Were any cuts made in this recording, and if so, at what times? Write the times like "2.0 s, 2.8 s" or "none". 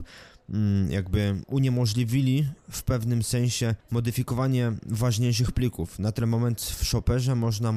3.8 s